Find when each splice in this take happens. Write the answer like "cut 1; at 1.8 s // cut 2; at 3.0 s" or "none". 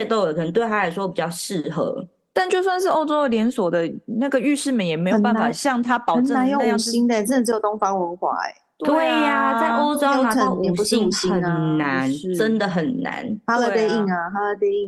none